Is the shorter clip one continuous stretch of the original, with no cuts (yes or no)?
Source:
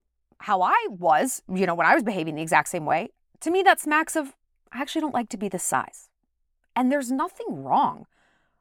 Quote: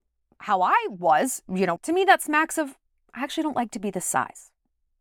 no